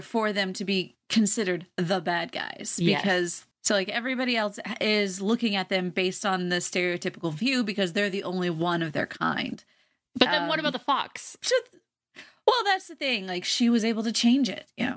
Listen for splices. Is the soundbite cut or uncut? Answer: cut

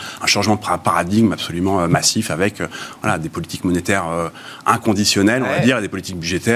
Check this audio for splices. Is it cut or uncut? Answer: uncut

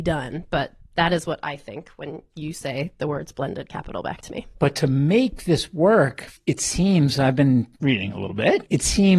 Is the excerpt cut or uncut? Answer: uncut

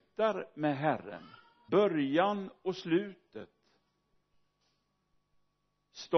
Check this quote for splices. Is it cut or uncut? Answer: cut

